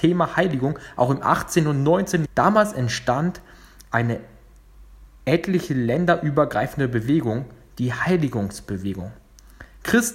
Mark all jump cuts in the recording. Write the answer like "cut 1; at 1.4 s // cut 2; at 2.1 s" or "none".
cut 1; at 2.3 s